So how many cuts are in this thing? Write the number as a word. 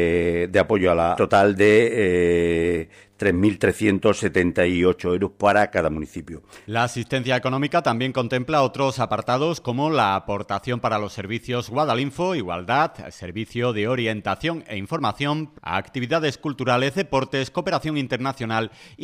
three